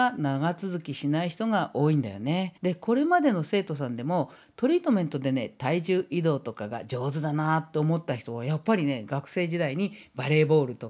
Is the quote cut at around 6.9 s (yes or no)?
no